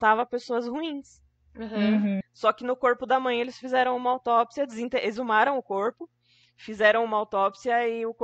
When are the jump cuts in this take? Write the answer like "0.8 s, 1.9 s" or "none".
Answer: 2.2 s